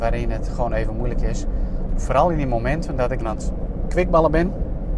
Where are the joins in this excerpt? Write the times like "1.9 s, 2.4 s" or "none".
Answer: 1.9 s, 3.2 s